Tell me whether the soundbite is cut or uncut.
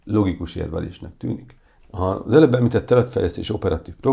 cut